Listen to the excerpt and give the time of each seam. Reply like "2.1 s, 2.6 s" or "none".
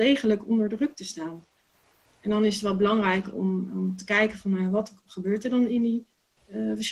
none